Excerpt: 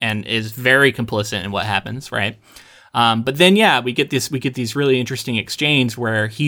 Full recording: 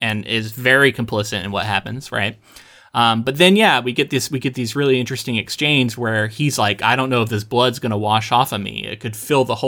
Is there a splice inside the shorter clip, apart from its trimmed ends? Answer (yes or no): no